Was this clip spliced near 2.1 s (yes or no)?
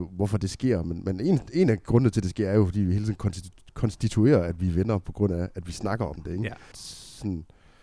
no